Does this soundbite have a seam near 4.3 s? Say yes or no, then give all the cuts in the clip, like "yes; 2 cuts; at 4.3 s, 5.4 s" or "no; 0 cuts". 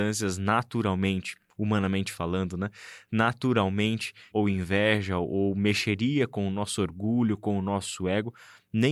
yes; 1 cut; at 4.3 s